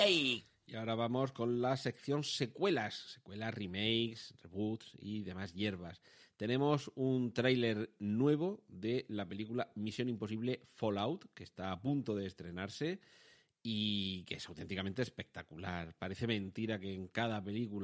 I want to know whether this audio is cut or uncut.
uncut